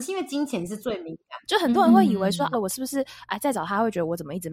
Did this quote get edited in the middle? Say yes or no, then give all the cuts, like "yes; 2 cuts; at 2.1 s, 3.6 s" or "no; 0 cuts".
yes; 2 cuts; at 1.4 s, 2.5 s